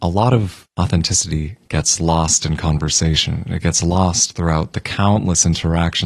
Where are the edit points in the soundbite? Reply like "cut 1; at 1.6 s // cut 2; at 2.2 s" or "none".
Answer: none